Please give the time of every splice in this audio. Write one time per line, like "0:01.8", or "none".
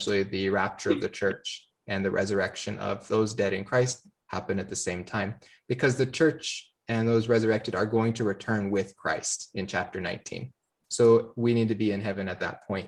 0:10.8